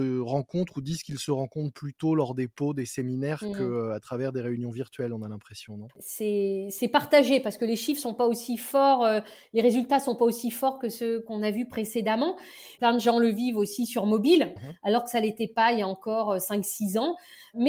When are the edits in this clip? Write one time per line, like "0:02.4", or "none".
0:12.8
0:14.6